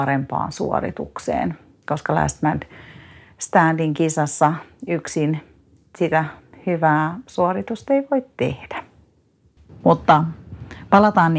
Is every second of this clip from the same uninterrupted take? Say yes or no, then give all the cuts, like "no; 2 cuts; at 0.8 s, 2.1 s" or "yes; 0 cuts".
yes; 0 cuts